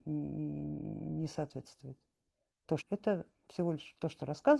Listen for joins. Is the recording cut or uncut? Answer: cut